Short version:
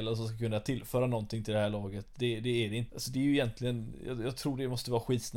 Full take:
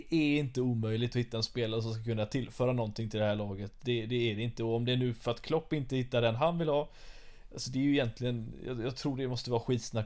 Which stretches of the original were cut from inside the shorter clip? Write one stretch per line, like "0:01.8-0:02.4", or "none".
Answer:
0:04.6-0:07.5